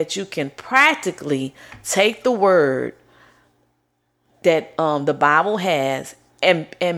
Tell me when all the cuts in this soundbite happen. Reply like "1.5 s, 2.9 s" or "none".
none